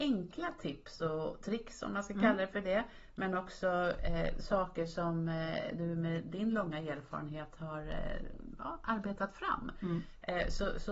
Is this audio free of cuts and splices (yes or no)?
yes